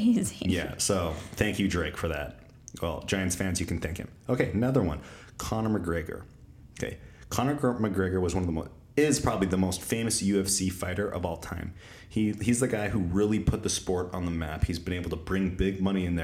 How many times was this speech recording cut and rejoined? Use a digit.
0